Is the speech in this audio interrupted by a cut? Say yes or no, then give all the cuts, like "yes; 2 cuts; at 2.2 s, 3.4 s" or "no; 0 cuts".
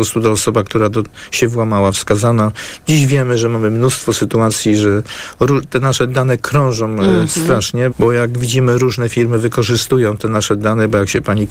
yes; 1 cut; at 7.9 s